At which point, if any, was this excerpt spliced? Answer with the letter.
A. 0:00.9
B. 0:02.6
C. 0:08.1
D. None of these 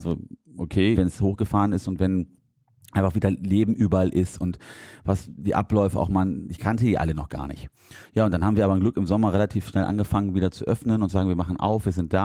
A